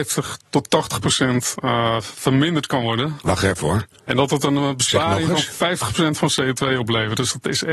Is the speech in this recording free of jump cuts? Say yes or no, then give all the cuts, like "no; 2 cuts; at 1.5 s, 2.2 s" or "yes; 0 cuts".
yes; 0 cuts